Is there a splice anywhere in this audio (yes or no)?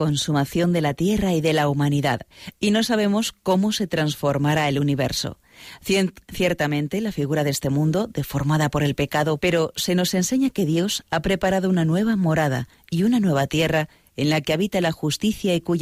yes